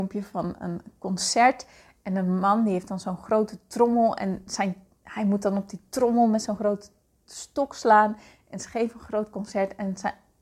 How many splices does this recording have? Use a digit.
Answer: 0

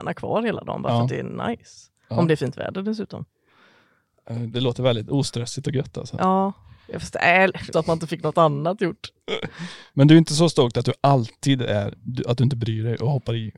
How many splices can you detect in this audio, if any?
1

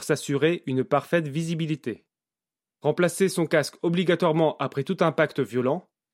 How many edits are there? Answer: 0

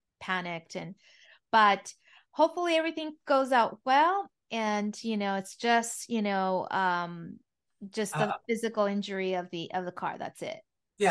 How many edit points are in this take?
0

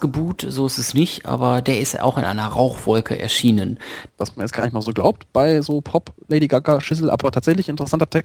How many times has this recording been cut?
1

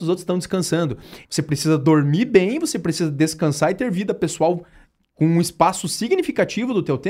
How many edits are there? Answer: 1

